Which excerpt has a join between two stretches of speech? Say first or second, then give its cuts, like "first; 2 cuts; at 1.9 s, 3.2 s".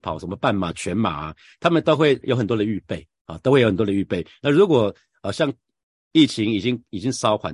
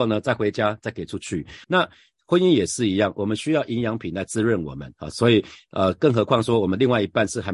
second; 1 cut; at 1.6 s